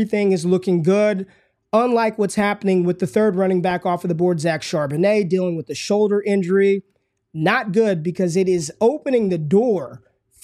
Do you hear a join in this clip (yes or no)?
no